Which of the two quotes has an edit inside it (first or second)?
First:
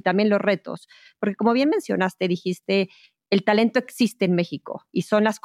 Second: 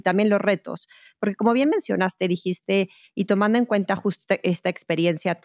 second